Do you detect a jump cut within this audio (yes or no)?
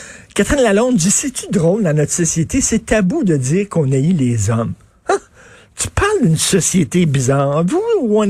no